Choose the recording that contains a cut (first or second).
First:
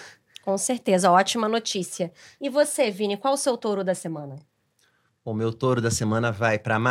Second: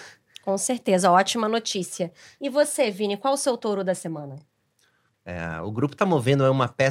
second